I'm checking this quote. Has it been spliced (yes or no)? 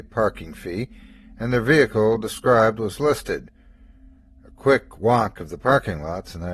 no